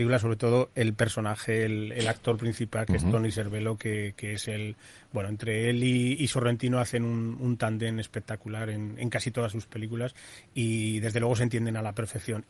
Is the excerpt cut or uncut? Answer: uncut